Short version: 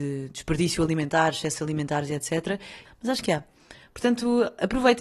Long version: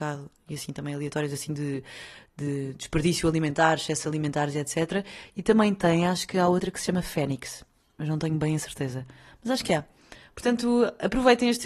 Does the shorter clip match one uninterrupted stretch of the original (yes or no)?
no